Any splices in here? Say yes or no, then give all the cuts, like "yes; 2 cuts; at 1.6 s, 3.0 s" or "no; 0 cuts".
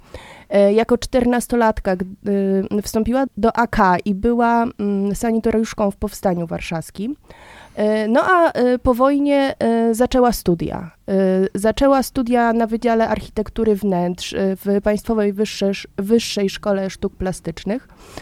yes; 1 cut; at 3.3 s